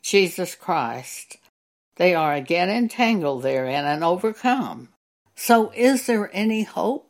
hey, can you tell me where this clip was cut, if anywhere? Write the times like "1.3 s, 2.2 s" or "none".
5.2 s